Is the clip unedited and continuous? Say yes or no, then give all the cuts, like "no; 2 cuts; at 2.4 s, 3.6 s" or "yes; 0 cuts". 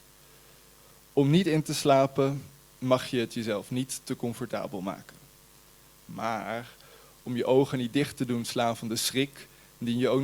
yes; 0 cuts